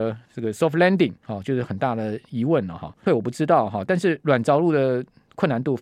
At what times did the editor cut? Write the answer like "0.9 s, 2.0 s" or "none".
3.1 s